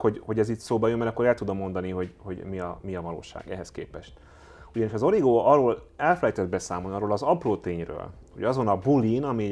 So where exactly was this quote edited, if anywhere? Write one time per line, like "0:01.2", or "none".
none

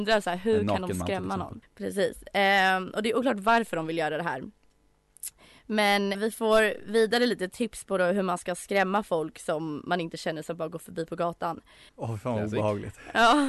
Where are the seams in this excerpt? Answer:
0:01.6
0:06.1
0:11.9

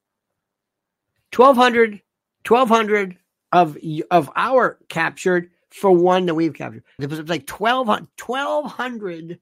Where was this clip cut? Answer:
0:07.0
0:08.1

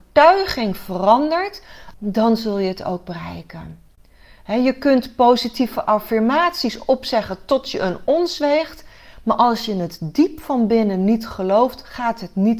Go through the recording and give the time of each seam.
0:01.9

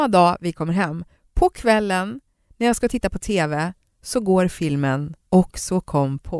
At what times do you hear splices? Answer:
0:05.2

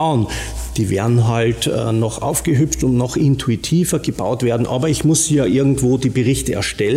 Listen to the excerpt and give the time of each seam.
none

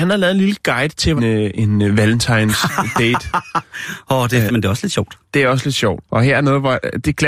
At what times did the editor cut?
0:01.2
0:04.5
0:06.0

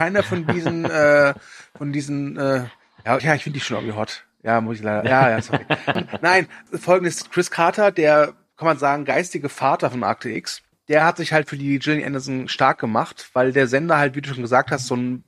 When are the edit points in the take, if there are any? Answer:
0:03.2

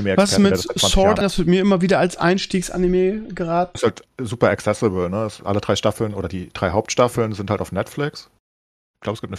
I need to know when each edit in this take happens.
0:01.2
0:03.7

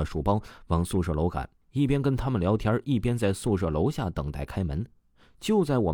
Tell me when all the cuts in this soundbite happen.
0:01.6

